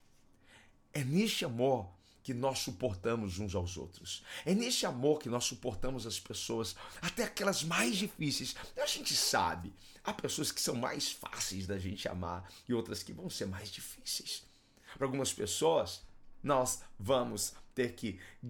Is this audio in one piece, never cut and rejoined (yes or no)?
yes